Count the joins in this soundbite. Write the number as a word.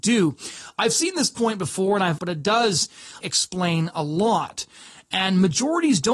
two